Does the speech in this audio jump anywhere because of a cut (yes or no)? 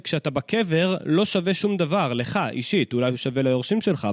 no